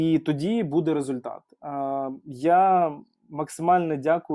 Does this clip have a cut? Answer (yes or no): no